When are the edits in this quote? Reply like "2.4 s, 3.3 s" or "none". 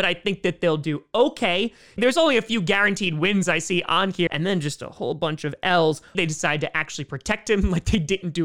2.0 s, 4.3 s, 6.1 s